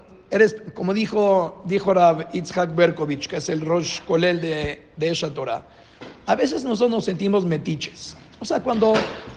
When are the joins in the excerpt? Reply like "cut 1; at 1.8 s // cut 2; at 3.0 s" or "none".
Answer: none